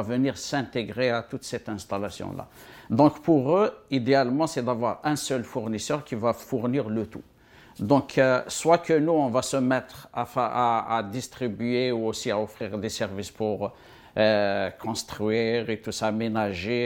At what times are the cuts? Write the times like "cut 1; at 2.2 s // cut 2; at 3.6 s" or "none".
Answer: none